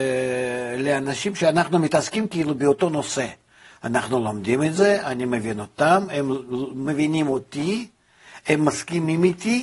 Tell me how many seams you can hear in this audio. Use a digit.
0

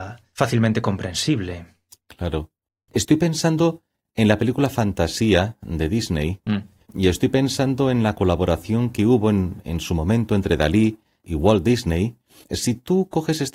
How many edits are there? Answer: 2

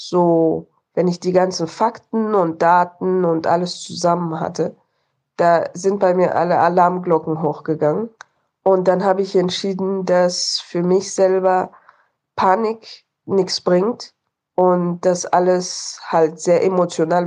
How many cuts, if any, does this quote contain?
0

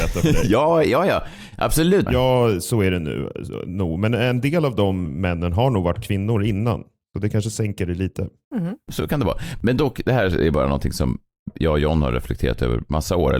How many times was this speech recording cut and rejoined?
2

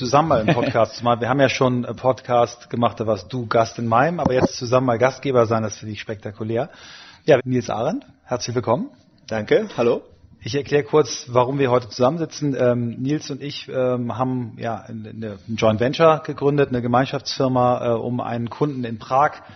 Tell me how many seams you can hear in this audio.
1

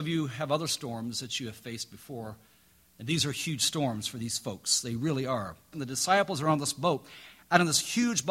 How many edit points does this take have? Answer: 1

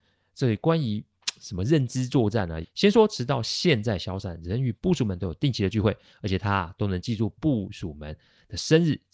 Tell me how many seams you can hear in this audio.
1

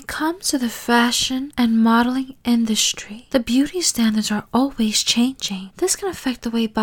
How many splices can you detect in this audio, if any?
1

